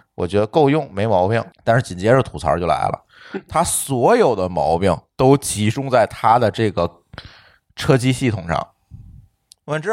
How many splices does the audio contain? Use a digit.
1